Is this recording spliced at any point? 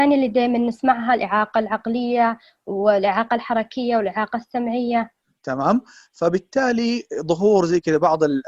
yes; 1 cut; at 5.4 s

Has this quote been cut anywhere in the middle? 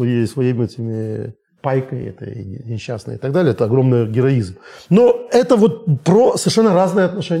no; 0 cuts

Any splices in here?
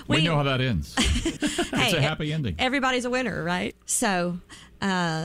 yes; 2 cuts; at 1.4 s, 3.7 s

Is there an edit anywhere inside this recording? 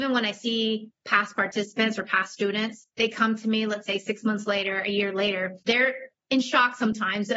no; 0 cuts

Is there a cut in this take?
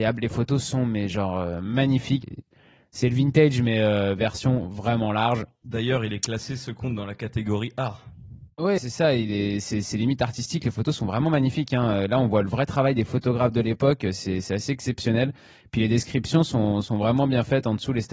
yes; 2 cuts; at 2.2 s, 8.8 s

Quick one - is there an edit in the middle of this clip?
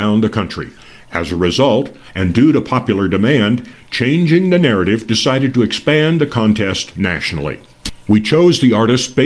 no; 0 cuts

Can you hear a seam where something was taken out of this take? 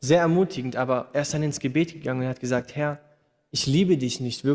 no; 0 cuts

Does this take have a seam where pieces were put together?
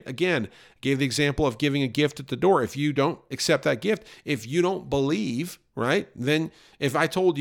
no; 0 cuts

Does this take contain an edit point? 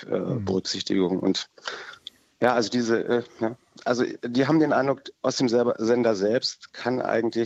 no; 0 cuts

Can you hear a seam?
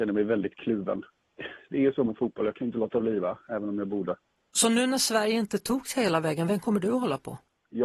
no; 0 cuts

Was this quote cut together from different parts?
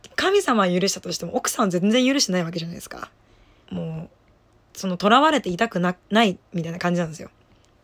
yes; 2 cuts; at 3.6 s, 6.5 s

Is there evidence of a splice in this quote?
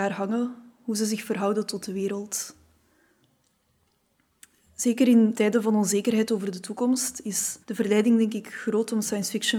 yes; 2 cuts; at 5.3 s, 7.6 s

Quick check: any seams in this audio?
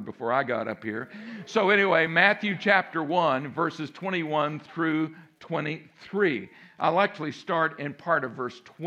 no; 0 cuts

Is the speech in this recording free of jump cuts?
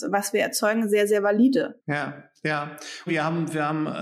no; 2 cuts; at 1.8 s, 3.1 s

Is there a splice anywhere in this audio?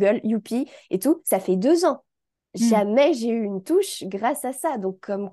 no; 0 cuts

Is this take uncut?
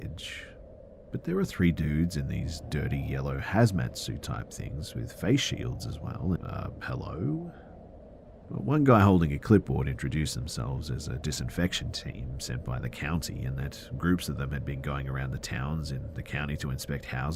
no; 1 cut; at 6.4 s

